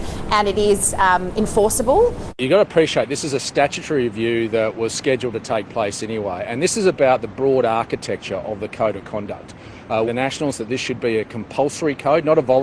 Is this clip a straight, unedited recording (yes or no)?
no